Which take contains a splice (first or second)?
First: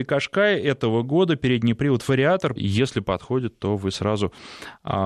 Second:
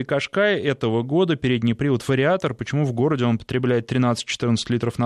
first